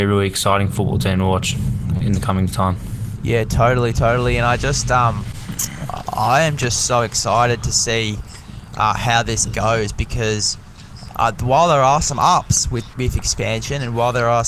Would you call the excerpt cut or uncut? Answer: cut